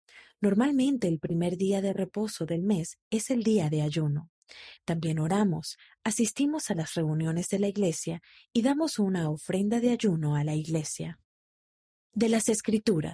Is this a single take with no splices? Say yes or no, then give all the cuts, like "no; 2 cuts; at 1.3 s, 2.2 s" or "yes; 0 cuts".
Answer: no; 1 cut; at 4.8 s